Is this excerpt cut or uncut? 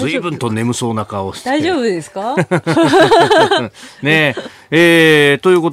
uncut